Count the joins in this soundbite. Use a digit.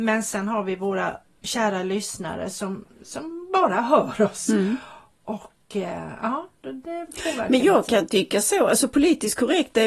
0